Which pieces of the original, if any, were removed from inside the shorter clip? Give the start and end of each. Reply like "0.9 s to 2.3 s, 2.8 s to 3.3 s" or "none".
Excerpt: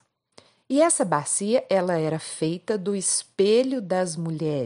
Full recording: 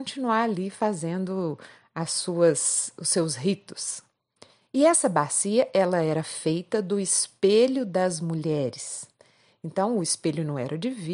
none